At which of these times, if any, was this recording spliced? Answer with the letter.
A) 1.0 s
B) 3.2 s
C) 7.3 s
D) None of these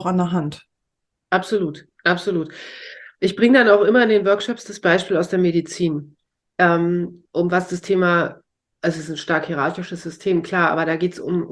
D